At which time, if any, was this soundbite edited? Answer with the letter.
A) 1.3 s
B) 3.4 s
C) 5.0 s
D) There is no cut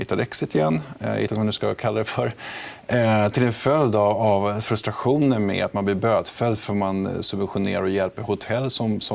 A